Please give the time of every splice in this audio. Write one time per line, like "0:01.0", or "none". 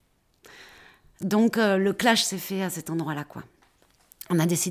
none